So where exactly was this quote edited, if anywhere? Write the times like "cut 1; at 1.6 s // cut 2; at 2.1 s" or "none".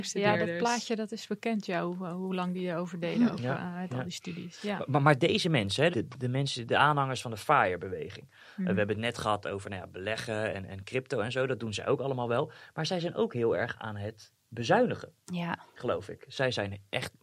cut 1; at 5.9 s